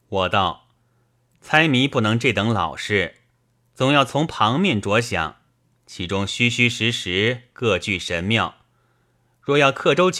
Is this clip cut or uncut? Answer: uncut